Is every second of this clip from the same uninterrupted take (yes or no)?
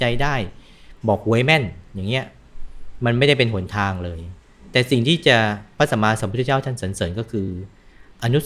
yes